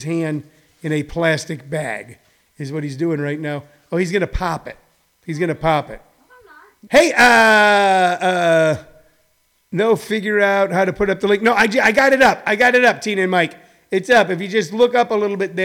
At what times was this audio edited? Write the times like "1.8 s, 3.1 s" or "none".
6.9 s